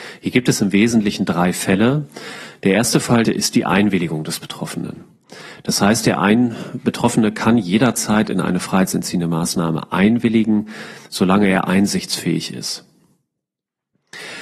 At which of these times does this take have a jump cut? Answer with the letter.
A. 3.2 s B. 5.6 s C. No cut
A